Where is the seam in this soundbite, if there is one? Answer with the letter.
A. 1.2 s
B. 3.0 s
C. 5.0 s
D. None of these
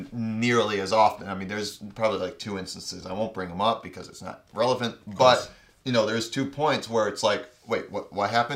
D